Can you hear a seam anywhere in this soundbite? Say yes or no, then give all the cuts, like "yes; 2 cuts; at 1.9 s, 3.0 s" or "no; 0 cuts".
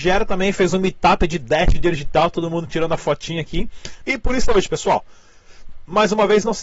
yes; 1 cut; at 4.0 s